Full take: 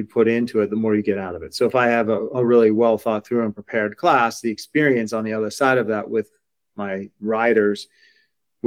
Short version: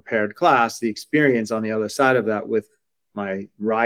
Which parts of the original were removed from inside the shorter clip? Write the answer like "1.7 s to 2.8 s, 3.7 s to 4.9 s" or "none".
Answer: none

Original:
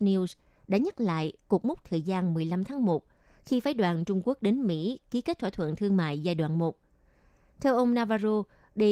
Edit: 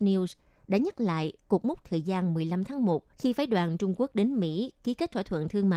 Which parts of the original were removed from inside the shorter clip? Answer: 3.1 s to 3.4 s

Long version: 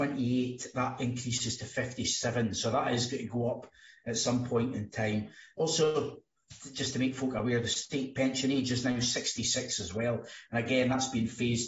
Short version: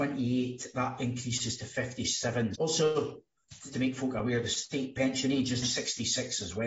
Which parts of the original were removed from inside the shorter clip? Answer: 2.5 s to 5.5 s, 6.7 s to 6.9 s, 8.8 s to 9.0 s

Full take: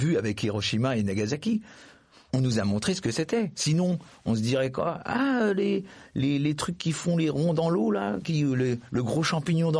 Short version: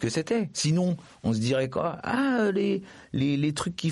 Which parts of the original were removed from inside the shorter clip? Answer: none

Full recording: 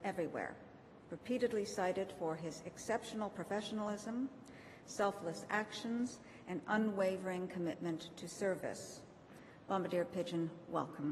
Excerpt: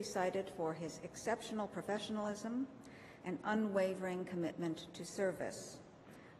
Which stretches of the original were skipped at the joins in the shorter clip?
4.8 s to 6.4 s

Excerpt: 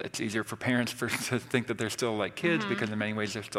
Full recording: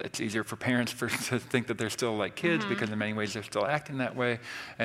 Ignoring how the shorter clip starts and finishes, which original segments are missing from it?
none

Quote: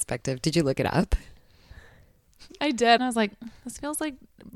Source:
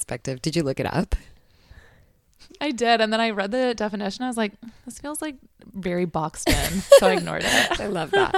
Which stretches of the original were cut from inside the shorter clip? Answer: 3.0 s to 4.2 s

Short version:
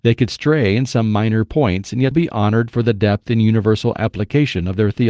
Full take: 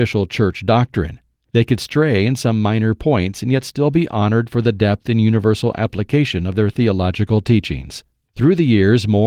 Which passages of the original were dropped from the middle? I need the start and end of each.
3.6 s to 3.9 s

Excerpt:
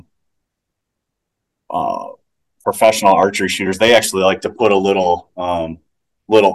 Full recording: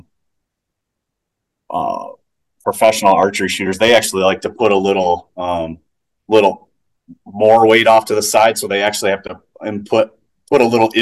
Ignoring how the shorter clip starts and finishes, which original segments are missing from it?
none

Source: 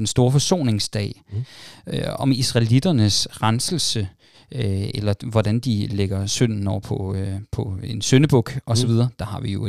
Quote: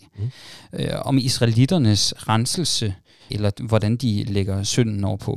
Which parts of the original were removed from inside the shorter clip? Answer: 4.4 s to 4.9 s

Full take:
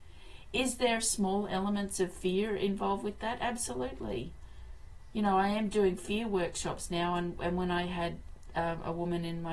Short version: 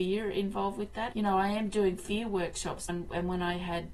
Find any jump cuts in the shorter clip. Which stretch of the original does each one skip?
3.4 s to 5.1 s, 6.9 s to 7.2 s

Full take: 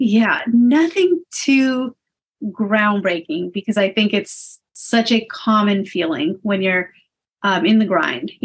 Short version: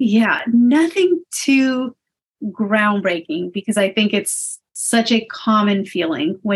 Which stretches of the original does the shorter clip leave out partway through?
none

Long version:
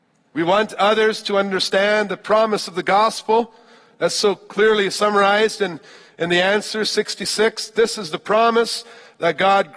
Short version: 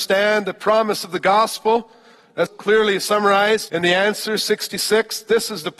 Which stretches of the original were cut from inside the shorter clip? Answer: 4.1 s to 4.4 s, 5.6 s to 6.1 s

